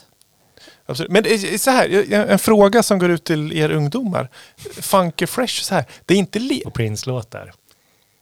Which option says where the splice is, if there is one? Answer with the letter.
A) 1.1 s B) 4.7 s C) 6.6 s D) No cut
C